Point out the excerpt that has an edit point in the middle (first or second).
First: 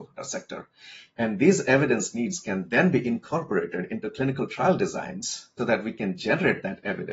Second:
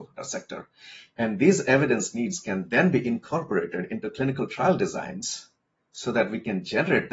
first